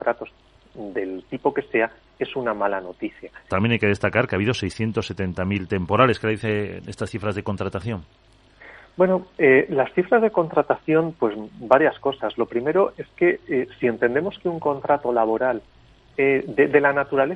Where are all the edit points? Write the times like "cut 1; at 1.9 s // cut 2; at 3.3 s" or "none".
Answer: cut 1; at 3.5 s